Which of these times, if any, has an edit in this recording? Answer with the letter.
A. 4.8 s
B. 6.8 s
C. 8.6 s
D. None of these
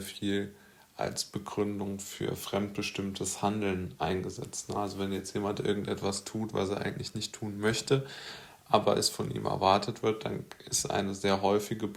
D